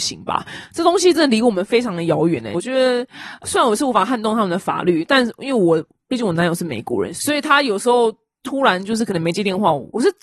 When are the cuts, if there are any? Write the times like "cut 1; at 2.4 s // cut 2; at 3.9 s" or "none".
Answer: cut 1; at 2.5 s